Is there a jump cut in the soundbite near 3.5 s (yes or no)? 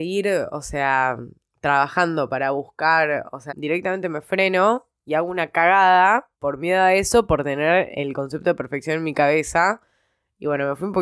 yes